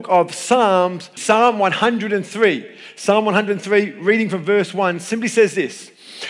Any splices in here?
yes; 1 cut; at 1.2 s

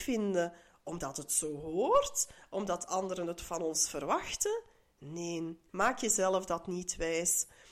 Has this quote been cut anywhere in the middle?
yes; 1 cut; at 5.7 s

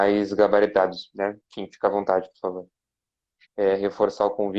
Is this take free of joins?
no; 1 cut; at 3.4 s

